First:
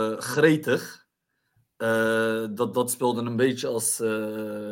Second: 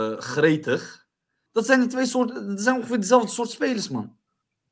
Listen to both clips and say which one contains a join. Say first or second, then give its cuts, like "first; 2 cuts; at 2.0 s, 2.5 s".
second; 1 cut; at 1.5 s